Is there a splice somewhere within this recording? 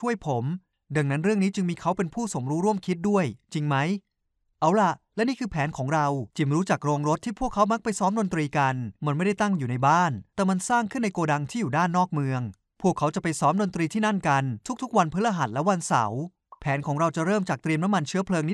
yes; 1 cut; at 6.3 s

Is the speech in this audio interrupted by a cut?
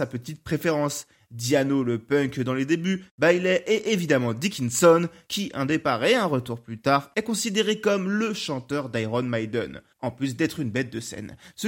no; 0 cuts

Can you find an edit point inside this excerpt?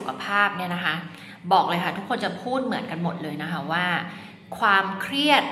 no; 0 cuts

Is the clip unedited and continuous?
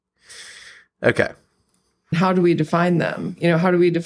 yes; 0 cuts

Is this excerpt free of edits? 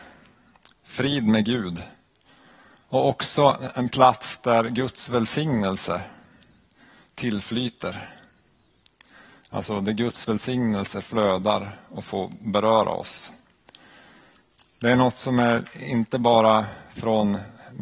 no; 1 cut; at 3.7 s

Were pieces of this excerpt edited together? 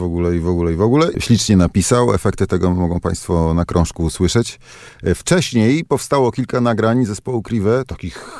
yes; 1 cut; at 1.1 s

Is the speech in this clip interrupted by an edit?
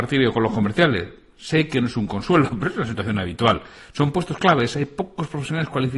no; 0 cuts

